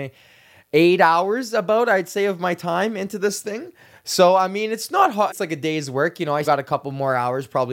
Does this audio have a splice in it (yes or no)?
yes